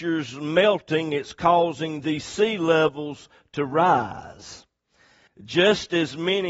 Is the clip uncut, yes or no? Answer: no